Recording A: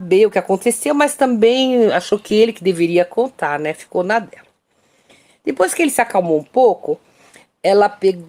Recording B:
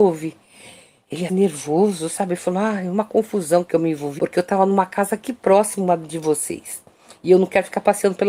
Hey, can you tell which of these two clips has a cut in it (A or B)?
B